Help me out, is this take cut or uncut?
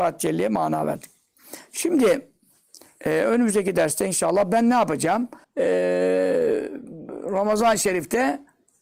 cut